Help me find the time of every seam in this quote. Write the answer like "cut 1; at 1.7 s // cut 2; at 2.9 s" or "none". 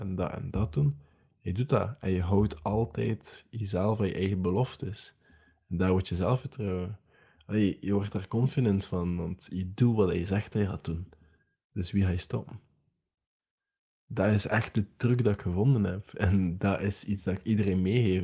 none